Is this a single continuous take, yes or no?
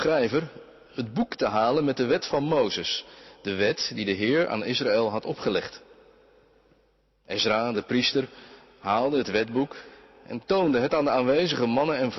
yes